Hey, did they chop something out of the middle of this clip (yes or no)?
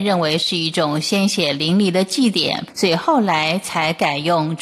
yes